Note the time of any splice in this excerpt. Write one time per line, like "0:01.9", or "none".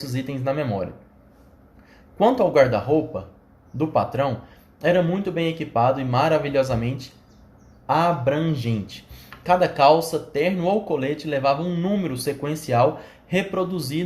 none